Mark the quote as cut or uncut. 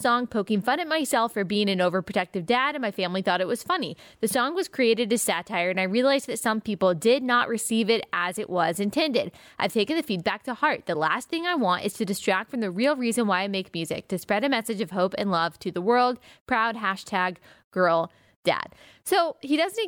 uncut